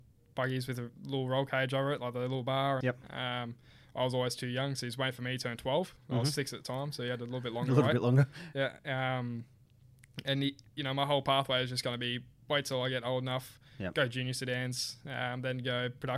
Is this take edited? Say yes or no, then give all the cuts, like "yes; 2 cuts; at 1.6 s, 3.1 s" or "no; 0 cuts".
yes; 1 cut; at 2.8 s